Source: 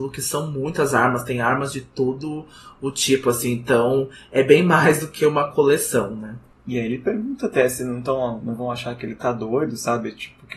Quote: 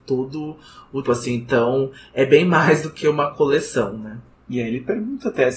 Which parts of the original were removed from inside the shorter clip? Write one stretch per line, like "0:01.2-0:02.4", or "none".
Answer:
0:02.9-0:03.2